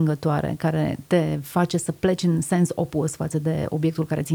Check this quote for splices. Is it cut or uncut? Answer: cut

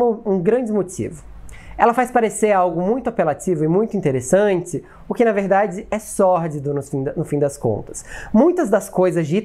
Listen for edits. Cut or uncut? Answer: uncut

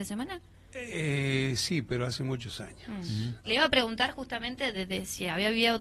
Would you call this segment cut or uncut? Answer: cut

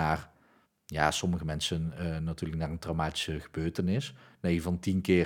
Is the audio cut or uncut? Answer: uncut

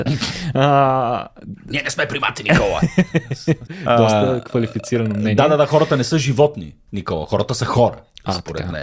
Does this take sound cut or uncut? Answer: cut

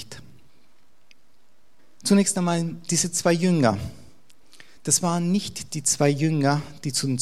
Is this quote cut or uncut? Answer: uncut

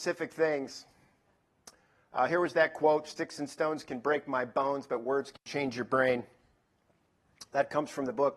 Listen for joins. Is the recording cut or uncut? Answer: uncut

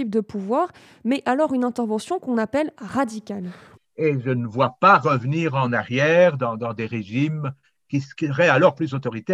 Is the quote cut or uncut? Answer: cut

